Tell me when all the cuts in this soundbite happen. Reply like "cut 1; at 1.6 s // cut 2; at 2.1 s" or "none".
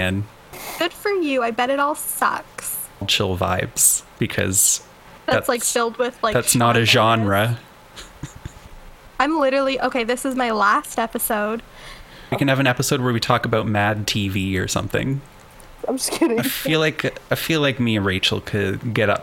cut 1; at 4.1 s // cut 2; at 12.3 s // cut 3; at 15.8 s

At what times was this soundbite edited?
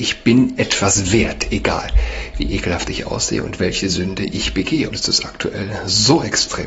cut 1; at 4.9 s

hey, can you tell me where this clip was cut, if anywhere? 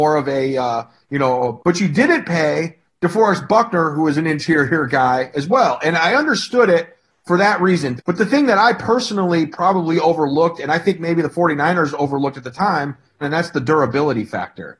cut 1; at 1.6 s // cut 2; at 8.0 s // cut 3; at 13.2 s

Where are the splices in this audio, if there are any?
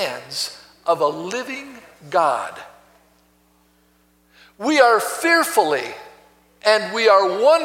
none

